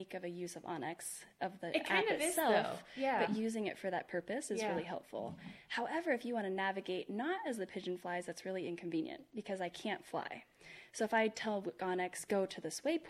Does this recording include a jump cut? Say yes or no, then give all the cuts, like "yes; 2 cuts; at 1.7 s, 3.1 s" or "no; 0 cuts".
no; 0 cuts